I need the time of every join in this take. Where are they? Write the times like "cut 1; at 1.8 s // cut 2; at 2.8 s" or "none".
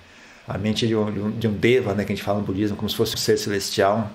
cut 1; at 3.1 s

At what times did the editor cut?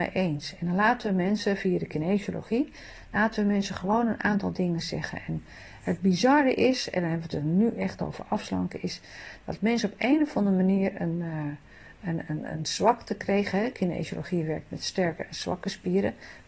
none

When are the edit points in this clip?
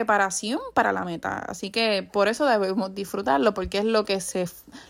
none

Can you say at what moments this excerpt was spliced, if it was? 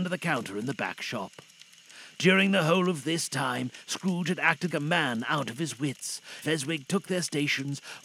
cut 1; at 4.7 s // cut 2; at 6.4 s

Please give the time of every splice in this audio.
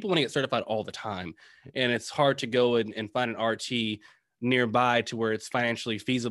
none

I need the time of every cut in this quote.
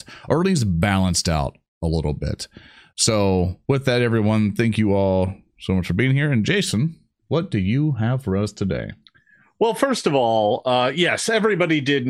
none

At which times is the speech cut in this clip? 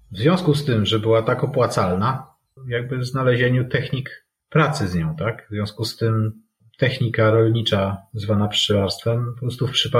cut 1; at 2.6 s

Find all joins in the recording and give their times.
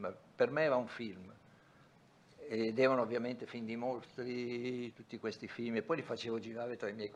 cut 1; at 4.9 s

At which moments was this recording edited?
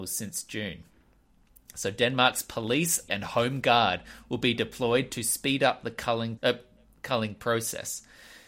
cut 1; at 3.1 s // cut 2; at 6.4 s

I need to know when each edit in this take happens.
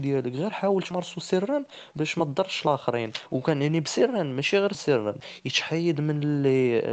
cut 1; at 4.7 s

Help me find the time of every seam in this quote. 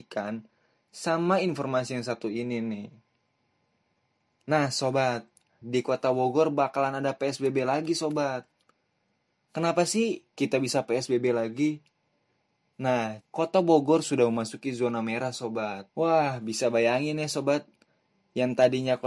cut 1; at 5.6 s // cut 2; at 13.2 s // cut 3; at 15.9 s

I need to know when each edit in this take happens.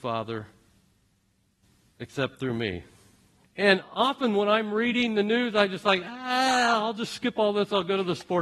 cut 1; at 3.4 s

